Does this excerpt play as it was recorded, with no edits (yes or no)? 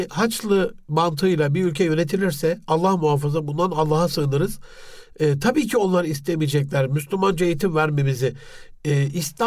yes